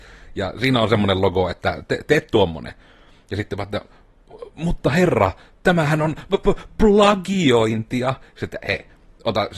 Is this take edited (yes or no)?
yes